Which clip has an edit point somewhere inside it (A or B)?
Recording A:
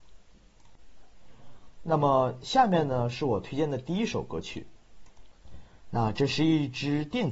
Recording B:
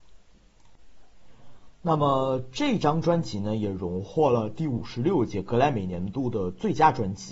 A